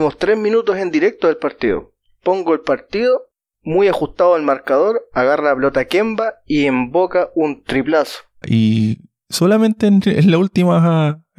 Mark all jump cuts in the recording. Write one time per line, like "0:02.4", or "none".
0:08.4